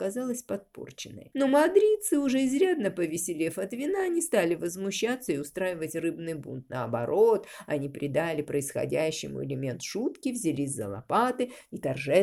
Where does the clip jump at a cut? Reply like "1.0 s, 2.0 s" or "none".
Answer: none